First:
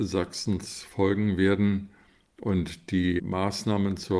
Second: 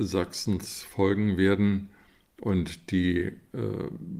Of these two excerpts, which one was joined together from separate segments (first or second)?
first